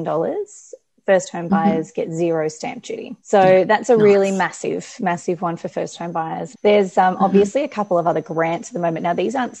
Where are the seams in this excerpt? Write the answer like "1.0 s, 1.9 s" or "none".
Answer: 3.2 s, 6.5 s